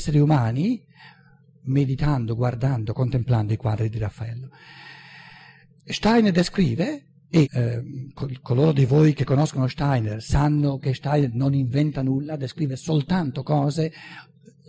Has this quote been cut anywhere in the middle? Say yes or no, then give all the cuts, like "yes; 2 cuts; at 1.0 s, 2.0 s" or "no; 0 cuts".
yes; 1 cut; at 7.4 s